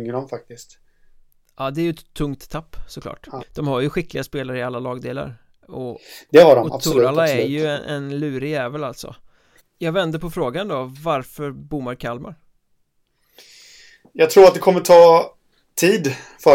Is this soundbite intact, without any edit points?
no; 2 cuts; at 3.4 s, 9.6 s

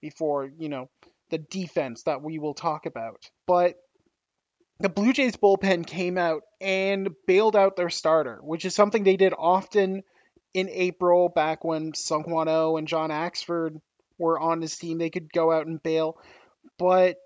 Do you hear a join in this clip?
yes; 1 cut; at 3.4 s

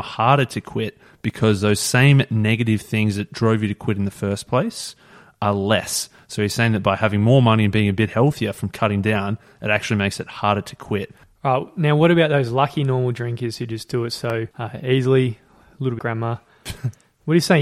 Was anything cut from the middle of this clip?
yes; 2 cuts; at 14.5 s, 16.0 s

